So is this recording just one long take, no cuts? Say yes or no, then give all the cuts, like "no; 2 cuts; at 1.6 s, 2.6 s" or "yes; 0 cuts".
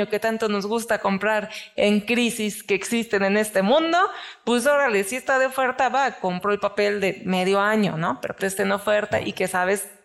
no; 1 cut; at 8.4 s